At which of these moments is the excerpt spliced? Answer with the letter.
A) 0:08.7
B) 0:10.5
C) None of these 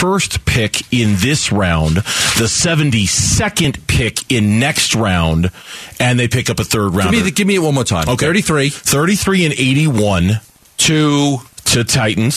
C